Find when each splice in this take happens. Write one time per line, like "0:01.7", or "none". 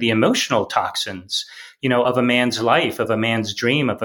none